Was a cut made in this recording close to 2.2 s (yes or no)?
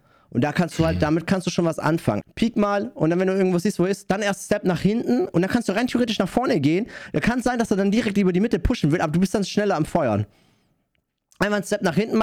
yes